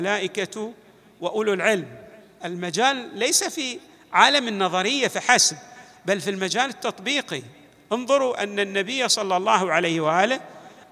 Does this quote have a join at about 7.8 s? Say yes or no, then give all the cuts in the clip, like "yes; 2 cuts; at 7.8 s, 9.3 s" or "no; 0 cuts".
no; 0 cuts